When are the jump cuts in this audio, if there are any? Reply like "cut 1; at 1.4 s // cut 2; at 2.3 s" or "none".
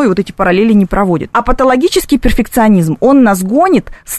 cut 1; at 1.3 s

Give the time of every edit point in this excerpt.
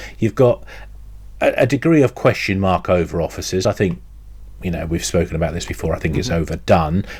none

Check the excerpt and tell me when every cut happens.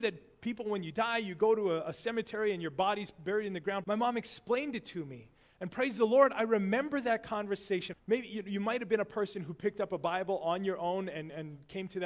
cut 1; at 3.8 s // cut 2; at 7.9 s

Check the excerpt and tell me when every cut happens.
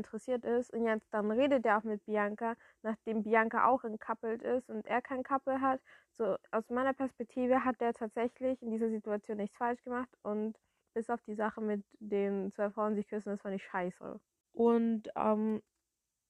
cut 1; at 10.8 s // cut 2; at 14.4 s

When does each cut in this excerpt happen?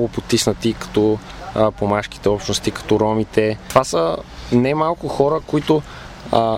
none

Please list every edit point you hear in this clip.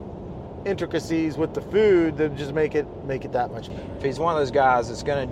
cut 1; at 4.0 s

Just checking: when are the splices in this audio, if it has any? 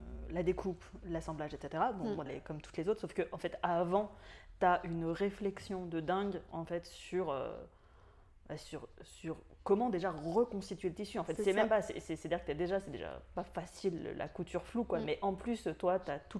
cut 1; at 2.3 s

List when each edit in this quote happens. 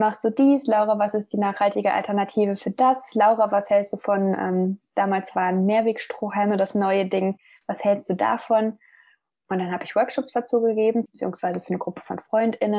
cut 1; at 9.3 s // cut 2; at 11.1 s

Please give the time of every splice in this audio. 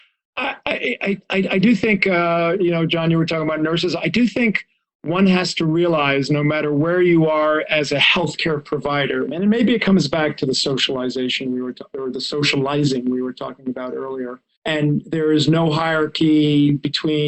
cut 1; at 9.3 s // cut 2; at 14.6 s

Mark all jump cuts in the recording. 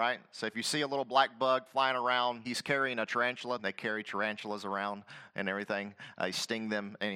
cut 1; at 2.5 s // cut 2; at 3.6 s

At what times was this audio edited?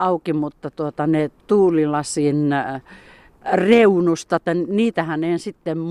cut 1; at 4.5 s

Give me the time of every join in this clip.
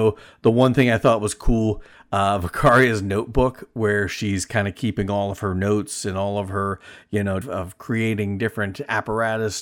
cut 1; at 7.4 s

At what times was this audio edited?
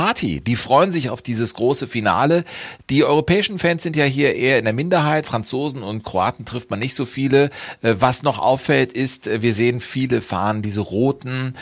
cut 1; at 5.2 s

